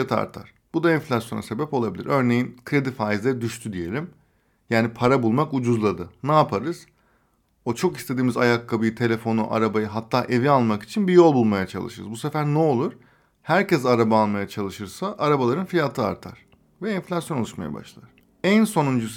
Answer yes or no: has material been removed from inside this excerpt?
no